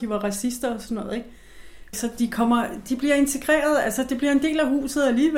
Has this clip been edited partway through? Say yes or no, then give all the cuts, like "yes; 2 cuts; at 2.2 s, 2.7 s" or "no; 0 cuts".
yes; 1 cut; at 1.9 s